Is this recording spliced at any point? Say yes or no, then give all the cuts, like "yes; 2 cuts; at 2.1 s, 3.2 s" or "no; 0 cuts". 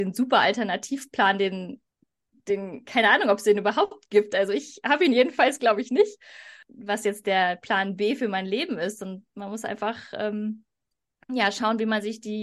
no; 0 cuts